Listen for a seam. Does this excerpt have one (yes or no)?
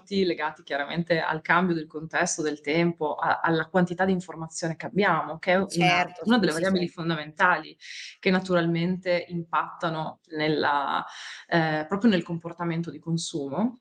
no